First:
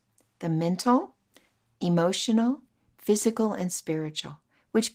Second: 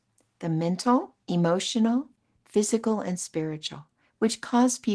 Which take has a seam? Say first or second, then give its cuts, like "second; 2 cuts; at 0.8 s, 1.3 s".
second; 1 cut; at 1.2 s